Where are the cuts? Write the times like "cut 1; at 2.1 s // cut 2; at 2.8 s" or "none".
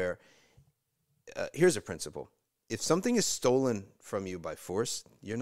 none